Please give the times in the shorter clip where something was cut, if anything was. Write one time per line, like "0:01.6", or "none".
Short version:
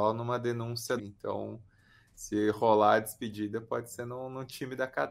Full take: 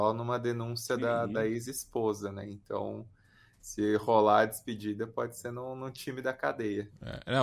0:01.0